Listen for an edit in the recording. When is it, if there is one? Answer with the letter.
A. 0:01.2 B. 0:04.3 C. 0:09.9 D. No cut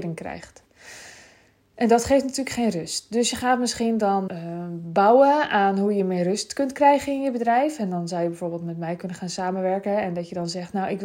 B